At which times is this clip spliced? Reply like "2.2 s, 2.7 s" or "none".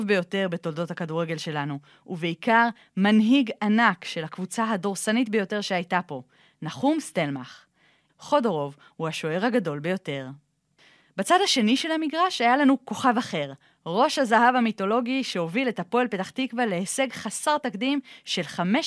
8.1 s

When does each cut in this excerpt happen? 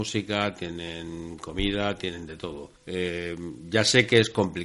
2.8 s

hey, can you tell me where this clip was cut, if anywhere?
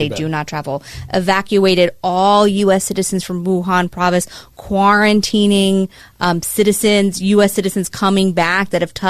none

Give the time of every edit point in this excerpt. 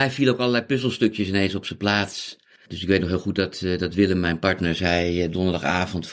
none

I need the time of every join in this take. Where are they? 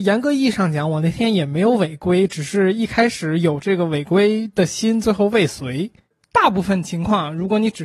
none

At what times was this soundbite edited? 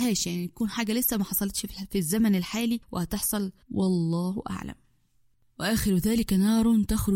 3.6 s

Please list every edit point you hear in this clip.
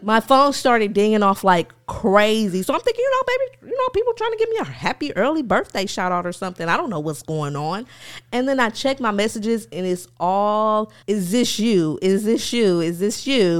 11.0 s

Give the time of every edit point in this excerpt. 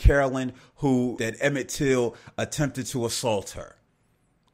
1.2 s

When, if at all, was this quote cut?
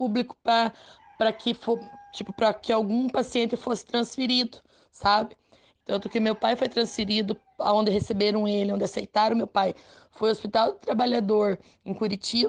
5.8 s

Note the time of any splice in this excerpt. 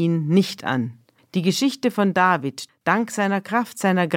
1.2 s, 2.7 s

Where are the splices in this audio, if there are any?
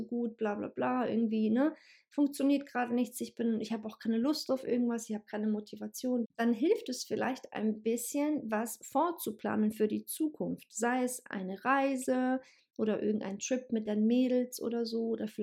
6.2 s

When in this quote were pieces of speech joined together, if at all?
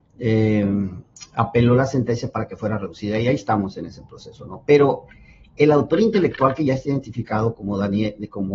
none

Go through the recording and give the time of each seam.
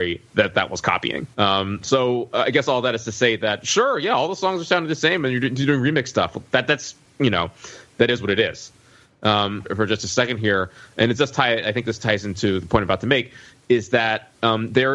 1.3 s, 9.6 s

